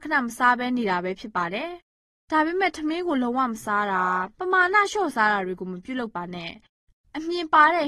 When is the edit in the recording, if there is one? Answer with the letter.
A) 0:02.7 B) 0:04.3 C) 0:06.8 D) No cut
B